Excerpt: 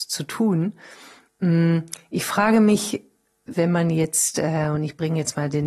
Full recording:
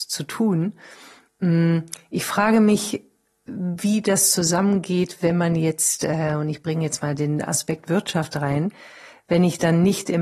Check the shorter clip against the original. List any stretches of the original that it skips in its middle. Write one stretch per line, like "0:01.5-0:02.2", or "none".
0:03.5-0:05.2